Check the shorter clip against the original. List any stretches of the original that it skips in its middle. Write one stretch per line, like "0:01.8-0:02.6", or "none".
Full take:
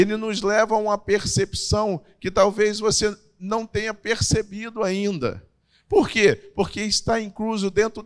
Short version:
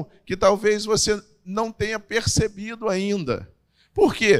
none